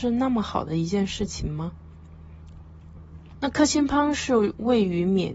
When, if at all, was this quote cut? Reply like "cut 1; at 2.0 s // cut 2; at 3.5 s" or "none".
cut 1; at 3.4 s